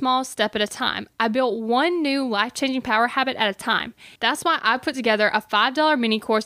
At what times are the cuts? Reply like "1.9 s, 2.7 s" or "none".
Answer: 4.2 s